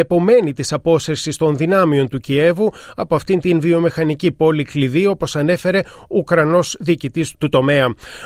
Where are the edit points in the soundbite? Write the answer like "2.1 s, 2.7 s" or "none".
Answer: 7.3 s